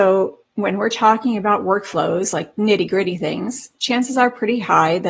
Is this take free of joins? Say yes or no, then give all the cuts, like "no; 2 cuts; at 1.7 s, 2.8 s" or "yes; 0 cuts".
yes; 0 cuts